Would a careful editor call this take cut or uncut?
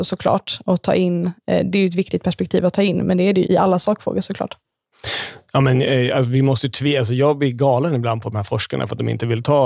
cut